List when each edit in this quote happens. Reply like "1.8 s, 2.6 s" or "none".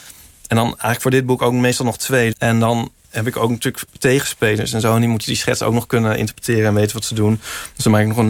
2.3 s